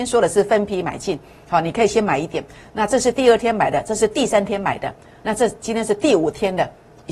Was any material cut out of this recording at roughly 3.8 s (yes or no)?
no